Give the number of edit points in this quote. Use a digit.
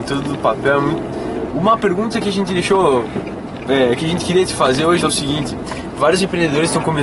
2